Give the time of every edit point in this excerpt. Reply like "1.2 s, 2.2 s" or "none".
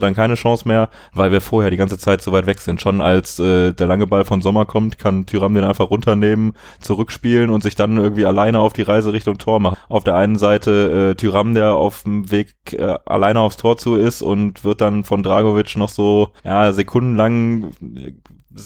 9.7 s, 16.4 s